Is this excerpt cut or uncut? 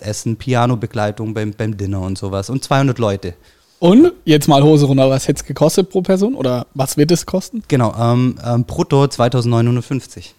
uncut